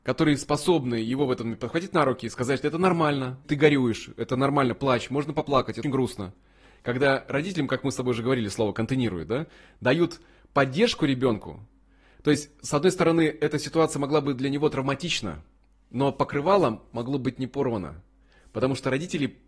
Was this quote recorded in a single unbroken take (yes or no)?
no